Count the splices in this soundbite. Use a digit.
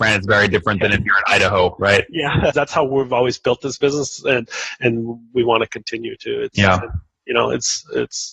1